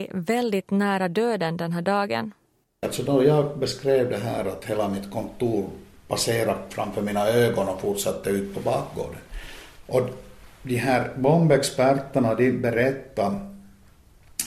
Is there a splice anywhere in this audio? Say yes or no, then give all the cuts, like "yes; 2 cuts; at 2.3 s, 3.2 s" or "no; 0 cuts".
yes; 2 cuts; at 2.8 s, 9.8 s